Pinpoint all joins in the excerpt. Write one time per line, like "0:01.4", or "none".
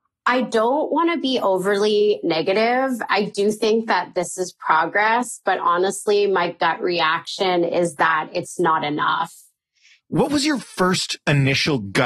0:10.0